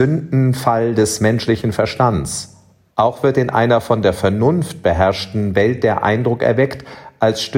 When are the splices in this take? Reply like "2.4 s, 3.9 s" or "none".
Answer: 2.9 s